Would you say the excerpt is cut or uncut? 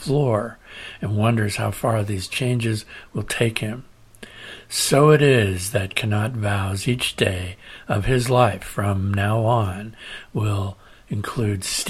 uncut